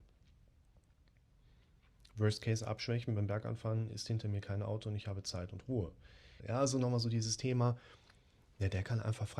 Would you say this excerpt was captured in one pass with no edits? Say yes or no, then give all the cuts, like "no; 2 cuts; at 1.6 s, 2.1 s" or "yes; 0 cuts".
no; 1 cut; at 6.4 s